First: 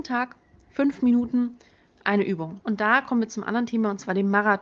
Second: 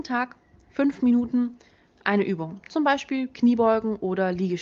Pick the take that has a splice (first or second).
first